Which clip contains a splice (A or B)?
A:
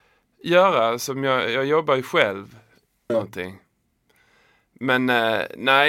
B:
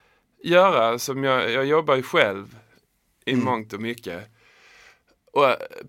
A